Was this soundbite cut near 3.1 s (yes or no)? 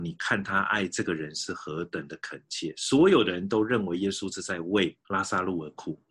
no